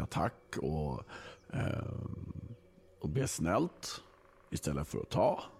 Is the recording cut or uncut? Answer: uncut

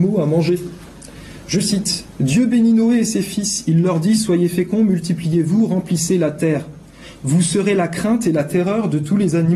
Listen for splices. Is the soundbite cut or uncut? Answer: uncut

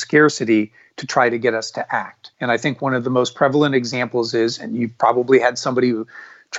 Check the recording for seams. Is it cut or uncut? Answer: cut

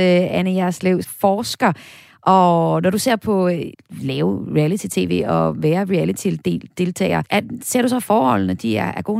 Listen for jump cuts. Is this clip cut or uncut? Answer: cut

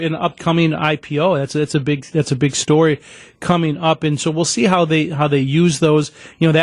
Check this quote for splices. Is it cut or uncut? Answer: uncut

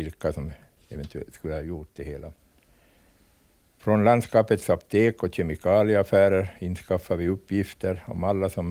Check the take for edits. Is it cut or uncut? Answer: uncut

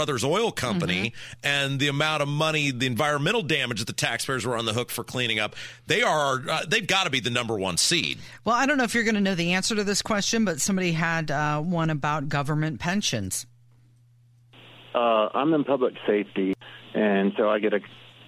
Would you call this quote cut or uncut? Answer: uncut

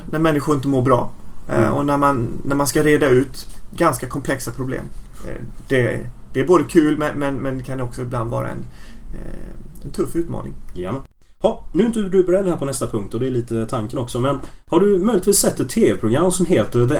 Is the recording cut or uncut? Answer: uncut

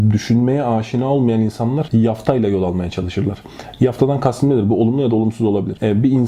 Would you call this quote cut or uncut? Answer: uncut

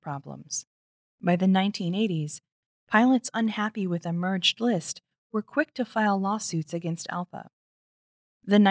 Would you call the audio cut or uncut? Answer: uncut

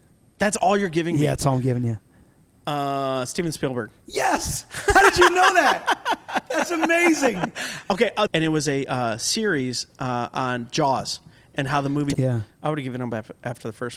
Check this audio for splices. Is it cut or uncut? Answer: cut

